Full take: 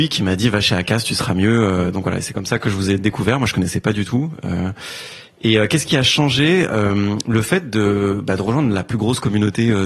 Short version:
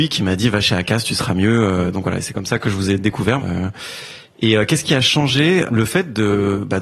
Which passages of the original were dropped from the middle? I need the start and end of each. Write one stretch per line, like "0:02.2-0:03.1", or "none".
0:03.4-0:04.4
0:06.7-0:07.2